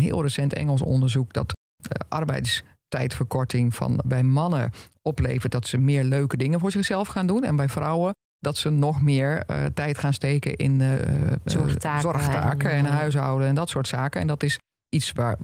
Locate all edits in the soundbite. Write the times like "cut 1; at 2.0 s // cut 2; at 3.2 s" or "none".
cut 1; at 4.0 s